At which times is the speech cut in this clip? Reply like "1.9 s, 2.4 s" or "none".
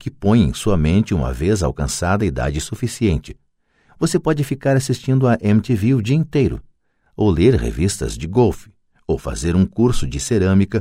none